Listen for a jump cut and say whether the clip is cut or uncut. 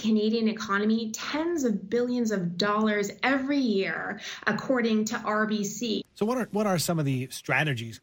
cut